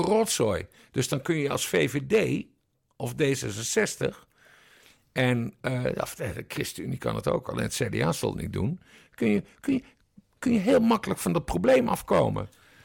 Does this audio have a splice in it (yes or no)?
no